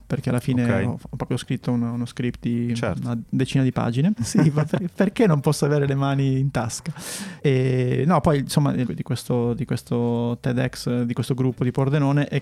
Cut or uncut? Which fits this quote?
cut